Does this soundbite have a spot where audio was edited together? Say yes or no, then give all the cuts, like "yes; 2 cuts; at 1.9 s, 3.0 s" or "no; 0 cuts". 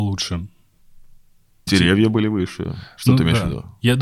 yes; 1 cut; at 1.7 s